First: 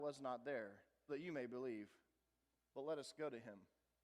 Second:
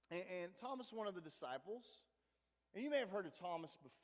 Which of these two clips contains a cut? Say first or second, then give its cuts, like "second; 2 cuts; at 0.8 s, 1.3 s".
first; 1 cut; at 1.1 s